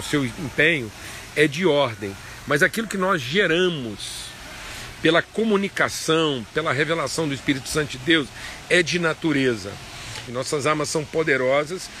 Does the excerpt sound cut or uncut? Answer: cut